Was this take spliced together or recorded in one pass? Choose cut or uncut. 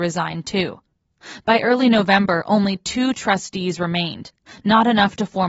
uncut